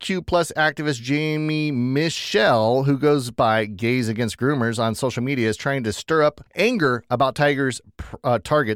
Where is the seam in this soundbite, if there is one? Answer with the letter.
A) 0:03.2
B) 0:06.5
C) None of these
B